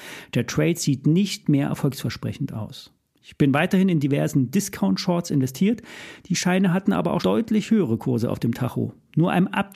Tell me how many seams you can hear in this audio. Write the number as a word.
one